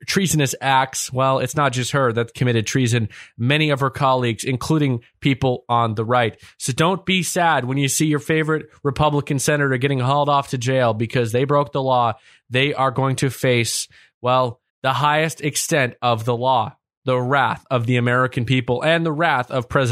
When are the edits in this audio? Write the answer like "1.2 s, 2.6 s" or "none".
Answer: 14.7 s